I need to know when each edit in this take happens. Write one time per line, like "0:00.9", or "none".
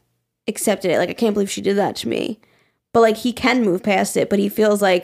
none